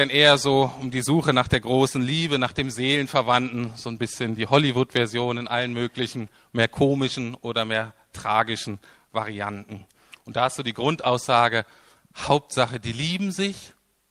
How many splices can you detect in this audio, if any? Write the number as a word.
zero